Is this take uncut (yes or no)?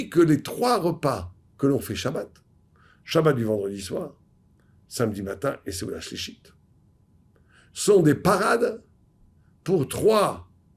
yes